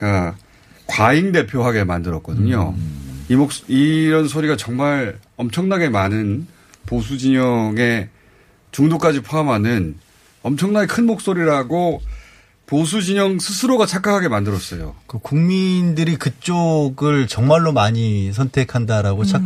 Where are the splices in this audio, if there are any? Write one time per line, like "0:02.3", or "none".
none